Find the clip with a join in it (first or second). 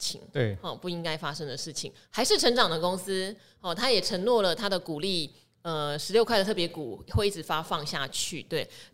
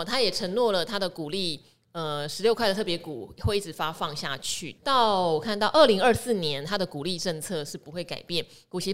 second